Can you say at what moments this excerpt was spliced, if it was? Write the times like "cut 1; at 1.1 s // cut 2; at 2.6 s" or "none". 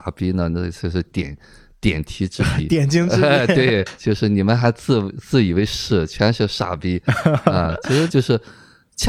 cut 1; at 8.1 s